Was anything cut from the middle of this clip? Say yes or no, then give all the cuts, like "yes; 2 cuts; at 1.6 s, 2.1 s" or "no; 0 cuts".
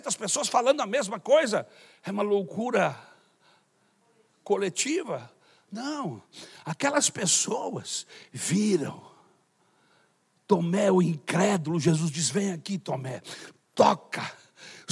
no; 0 cuts